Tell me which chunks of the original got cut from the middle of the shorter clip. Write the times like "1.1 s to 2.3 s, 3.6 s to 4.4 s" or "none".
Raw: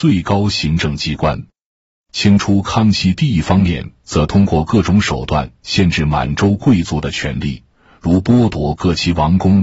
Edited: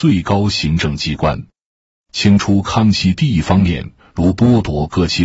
4.0 s to 7.9 s